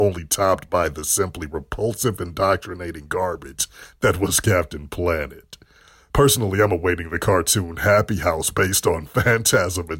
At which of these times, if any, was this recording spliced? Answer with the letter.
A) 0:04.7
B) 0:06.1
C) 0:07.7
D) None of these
D